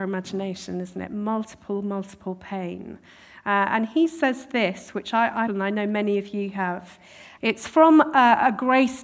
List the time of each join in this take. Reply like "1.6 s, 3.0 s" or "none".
5.5 s, 7.4 s